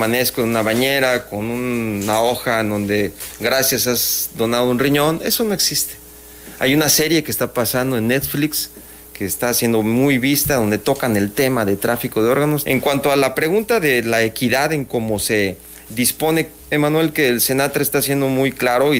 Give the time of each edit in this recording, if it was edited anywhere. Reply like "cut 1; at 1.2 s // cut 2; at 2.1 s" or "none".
cut 1; at 12.6 s // cut 2; at 16.7 s